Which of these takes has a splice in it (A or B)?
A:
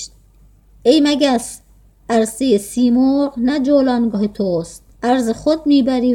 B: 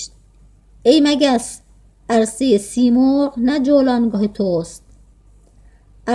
A